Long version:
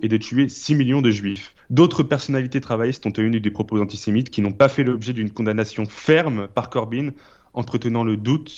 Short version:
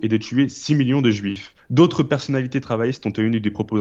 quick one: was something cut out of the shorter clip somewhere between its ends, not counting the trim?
no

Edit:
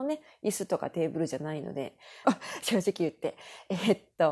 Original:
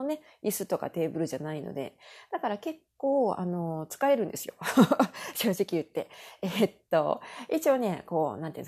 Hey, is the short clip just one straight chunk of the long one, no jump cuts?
no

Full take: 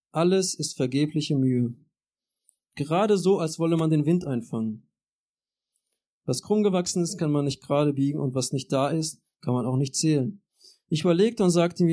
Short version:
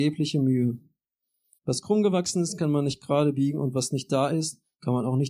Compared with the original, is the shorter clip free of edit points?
no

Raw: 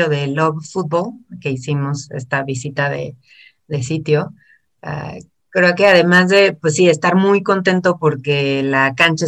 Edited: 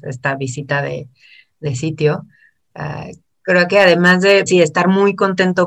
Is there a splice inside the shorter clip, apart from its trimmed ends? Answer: yes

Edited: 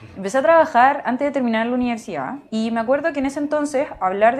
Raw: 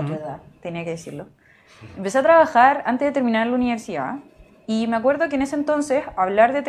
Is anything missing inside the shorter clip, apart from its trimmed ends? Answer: yes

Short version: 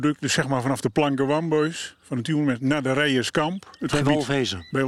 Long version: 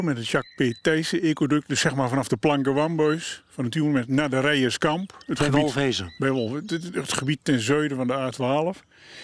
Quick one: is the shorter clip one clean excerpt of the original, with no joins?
yes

